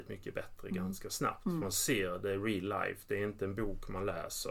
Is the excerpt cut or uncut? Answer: uncut